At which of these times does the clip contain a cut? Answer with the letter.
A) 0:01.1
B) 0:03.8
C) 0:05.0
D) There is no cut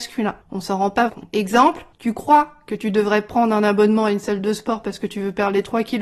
A